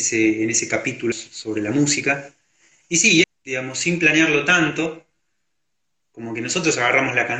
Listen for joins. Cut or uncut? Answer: cut